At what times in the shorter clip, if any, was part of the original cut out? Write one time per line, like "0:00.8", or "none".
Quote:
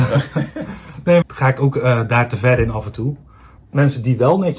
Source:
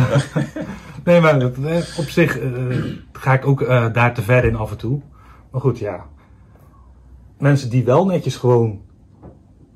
0:01.2
0:03.6